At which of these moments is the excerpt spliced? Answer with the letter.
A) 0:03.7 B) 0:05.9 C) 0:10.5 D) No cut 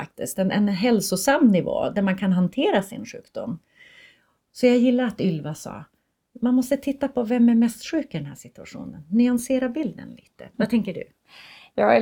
C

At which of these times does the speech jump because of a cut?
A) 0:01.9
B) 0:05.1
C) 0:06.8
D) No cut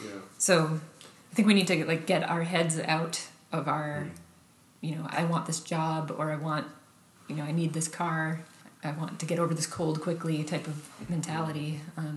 B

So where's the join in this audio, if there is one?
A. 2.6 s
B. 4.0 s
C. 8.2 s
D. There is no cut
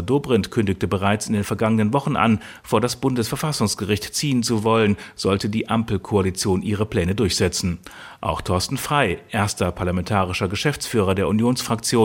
D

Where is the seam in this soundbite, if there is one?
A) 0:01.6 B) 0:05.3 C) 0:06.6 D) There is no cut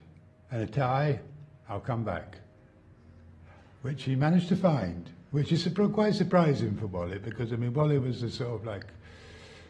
D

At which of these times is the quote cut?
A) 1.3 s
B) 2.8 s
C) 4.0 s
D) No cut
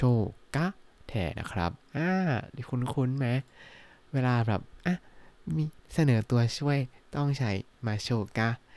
A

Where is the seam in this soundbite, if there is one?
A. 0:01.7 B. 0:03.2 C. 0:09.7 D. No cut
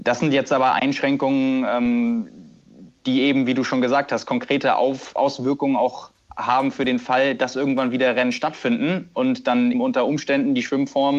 C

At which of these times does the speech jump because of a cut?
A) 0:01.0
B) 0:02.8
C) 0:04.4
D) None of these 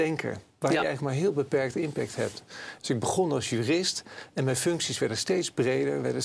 B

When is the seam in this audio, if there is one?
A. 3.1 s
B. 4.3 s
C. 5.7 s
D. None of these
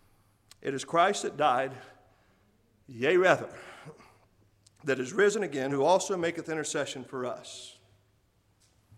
C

